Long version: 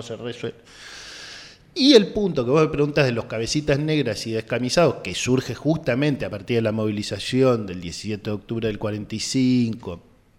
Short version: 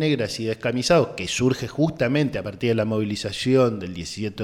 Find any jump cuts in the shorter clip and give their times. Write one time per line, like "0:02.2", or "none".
none